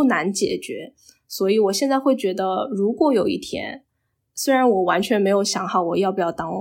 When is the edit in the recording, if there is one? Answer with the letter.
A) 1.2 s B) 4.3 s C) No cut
C